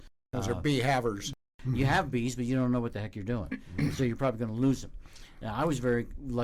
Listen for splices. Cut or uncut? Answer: uncut